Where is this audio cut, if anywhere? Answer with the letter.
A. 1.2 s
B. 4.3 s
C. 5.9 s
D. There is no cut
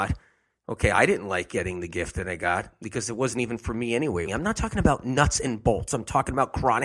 B